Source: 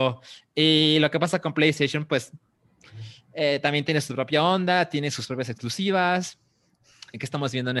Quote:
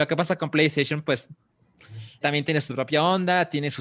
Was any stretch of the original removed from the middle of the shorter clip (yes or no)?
yes